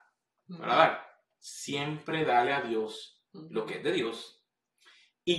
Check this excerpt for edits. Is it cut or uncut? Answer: cut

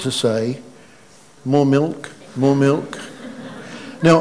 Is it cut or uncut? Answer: cut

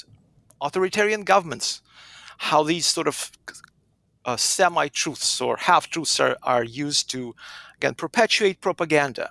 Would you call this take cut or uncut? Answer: uncut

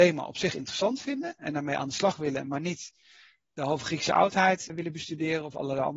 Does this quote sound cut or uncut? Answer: cut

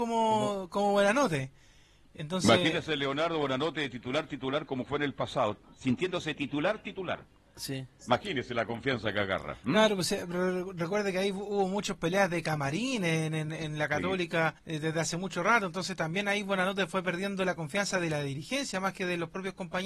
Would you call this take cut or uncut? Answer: cut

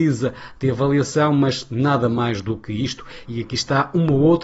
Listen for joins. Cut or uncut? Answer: cut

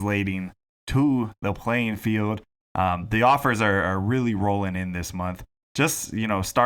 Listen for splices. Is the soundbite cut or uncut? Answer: cut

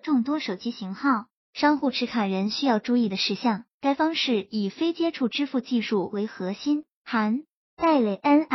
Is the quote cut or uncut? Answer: cut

